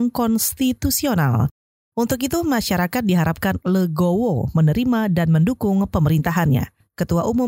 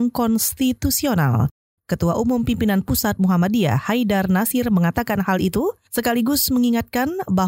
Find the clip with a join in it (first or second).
second